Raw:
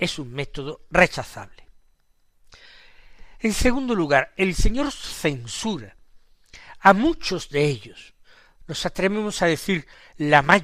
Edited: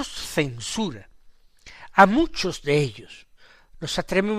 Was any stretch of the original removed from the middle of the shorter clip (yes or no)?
no